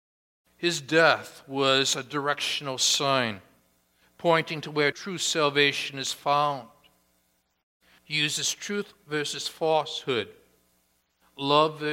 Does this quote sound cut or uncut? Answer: cut